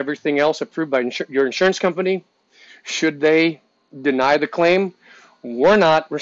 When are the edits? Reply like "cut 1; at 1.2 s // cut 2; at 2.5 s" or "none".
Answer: none